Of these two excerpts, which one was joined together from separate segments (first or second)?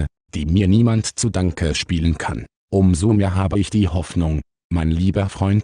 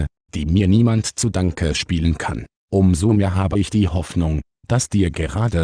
first